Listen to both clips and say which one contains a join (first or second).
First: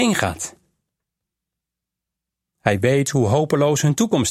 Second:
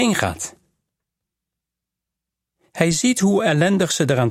first